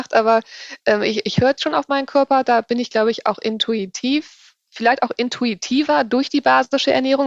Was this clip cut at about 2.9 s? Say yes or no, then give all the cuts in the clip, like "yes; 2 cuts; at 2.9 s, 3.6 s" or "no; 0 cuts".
no; 1 cut; at 1.6 s